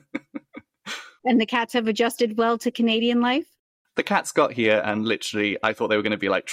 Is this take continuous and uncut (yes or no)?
yes